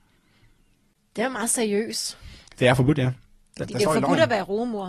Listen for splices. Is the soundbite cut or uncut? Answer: cut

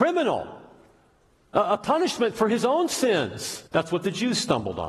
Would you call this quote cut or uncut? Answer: cut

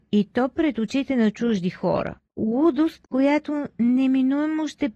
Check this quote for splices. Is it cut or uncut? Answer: uncut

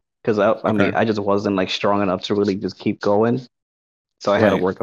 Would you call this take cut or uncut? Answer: uncut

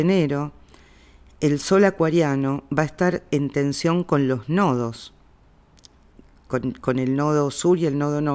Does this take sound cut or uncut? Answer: uncut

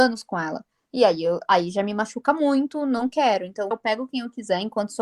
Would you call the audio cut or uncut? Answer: cut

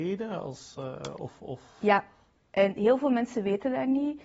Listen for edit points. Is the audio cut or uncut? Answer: uncut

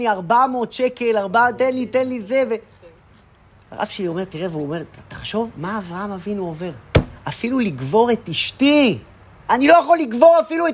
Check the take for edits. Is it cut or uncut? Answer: uncut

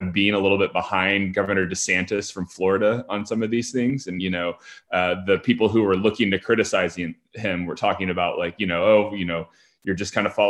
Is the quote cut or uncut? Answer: uncut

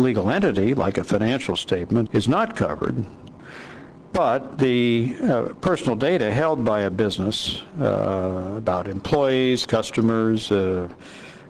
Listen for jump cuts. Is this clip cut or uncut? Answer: cut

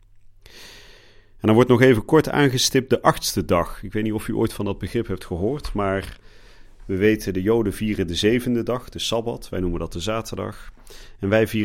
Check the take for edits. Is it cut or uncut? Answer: uncut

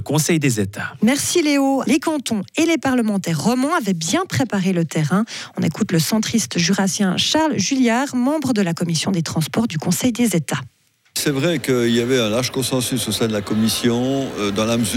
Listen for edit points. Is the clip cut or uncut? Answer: cut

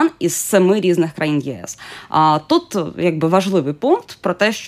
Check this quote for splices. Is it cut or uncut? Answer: uncut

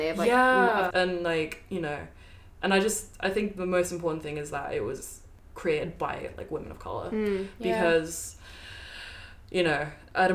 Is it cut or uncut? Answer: cut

